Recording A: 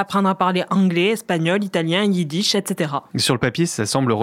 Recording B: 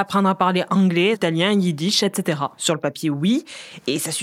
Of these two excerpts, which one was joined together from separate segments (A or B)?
B